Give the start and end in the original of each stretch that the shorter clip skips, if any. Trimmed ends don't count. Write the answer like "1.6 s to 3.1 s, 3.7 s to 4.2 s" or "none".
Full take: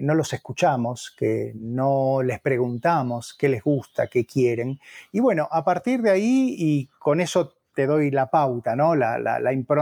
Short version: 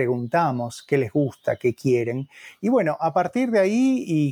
none